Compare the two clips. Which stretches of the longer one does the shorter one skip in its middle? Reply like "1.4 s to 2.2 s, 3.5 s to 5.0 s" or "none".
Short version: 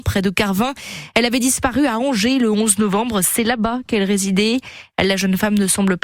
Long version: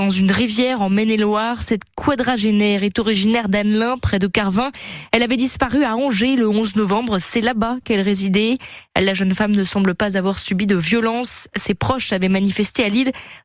none